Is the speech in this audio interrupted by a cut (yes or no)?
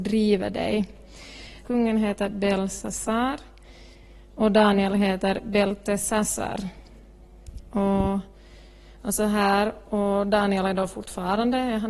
yes